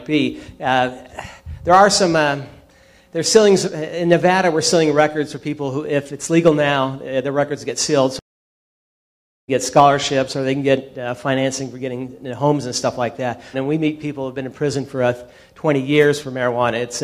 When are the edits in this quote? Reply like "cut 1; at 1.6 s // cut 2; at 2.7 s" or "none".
cut 1; at 13.5 s